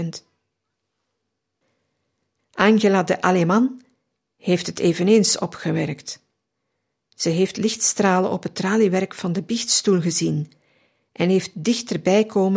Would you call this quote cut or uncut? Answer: cut